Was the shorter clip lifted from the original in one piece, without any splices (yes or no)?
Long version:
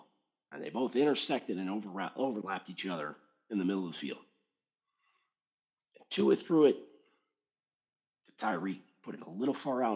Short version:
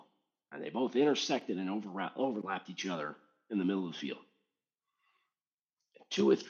yes